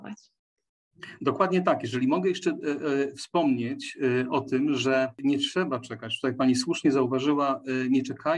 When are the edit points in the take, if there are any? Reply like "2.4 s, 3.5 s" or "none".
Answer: none